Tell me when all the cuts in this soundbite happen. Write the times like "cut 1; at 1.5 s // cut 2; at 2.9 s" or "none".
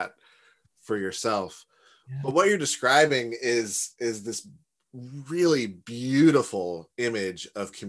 none